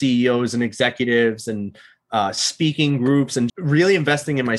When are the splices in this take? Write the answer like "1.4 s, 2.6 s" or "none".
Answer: 3.5 s

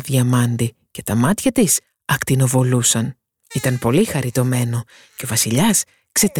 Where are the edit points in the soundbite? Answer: 3.5 s

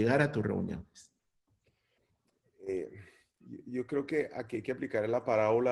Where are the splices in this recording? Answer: none

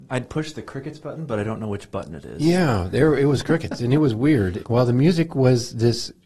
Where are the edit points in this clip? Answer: 4.6 s

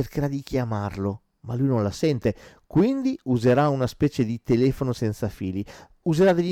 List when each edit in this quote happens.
none

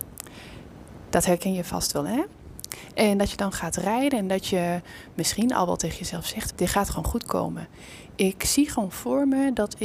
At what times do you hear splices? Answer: 6.5 s

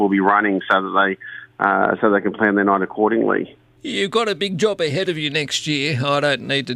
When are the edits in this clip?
3.8 s

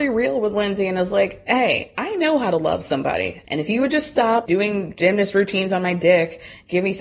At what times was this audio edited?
3.4 s, 4.5 s

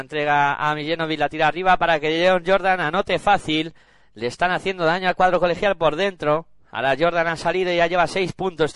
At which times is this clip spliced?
none

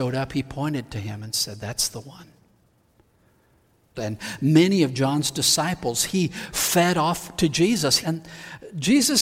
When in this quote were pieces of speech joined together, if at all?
4.0 s, 8.0 s

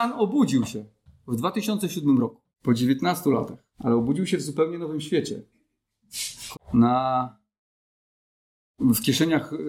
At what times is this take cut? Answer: 2.5 s, 3.7 s, 6.5 s

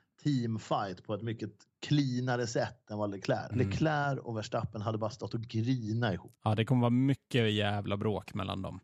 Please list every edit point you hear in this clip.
3.5 s

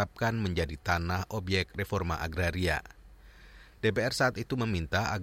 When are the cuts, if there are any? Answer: 3.7 s

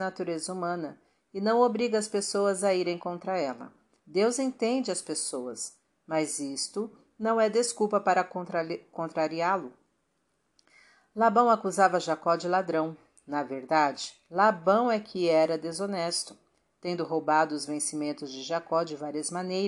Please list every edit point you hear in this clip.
4.0 s

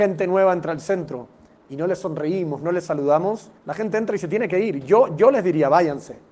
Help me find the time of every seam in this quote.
3.6 s

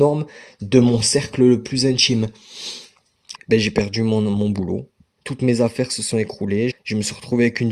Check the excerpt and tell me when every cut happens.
3.3 s, 6.7 s

